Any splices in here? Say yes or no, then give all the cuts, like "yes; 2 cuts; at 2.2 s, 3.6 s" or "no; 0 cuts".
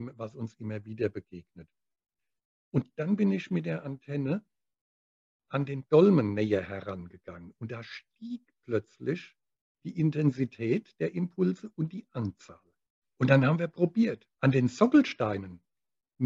yes; 2 cuts; at 13.0 s, 14.3 s